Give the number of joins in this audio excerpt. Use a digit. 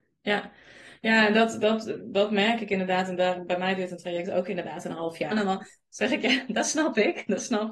1